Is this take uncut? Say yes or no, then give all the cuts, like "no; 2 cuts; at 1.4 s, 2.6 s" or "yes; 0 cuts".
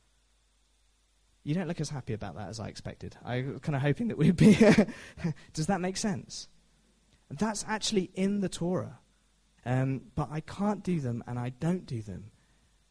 no; 1 cut; at 9.6 s